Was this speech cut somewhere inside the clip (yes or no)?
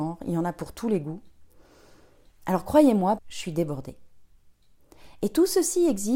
yes